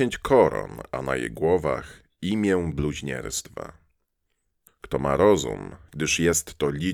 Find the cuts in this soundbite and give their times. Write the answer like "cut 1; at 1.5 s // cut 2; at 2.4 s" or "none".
cut 1; at 4.7 s // cut 2; at 5.9 s